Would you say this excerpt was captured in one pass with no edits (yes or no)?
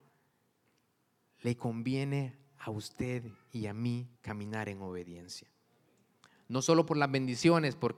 no